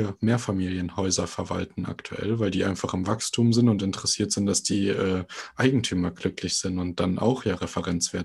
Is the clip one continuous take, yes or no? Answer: yes